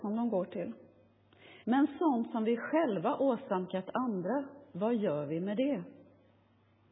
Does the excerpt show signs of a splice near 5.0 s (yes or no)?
no